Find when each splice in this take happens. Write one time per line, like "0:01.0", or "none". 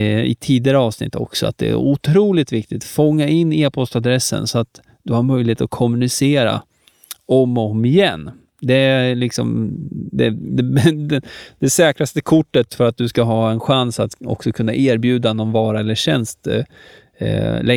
0:12.7